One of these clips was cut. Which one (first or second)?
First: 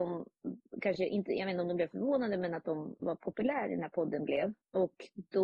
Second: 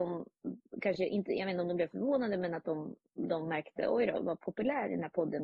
first